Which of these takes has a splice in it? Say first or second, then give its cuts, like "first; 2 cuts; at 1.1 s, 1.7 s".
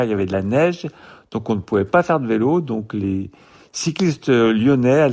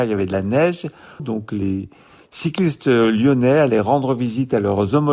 second; 1 cut; at 1.2 s